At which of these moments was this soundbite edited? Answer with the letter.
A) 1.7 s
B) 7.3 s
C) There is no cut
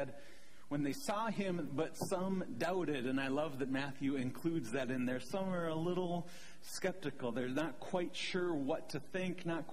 A